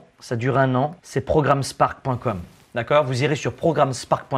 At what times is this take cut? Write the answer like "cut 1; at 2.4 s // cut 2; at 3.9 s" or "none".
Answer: cut 1; at 1.0 s